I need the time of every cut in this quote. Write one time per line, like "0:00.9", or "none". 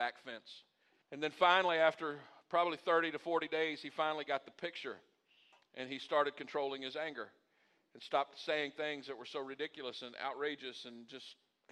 0:01.0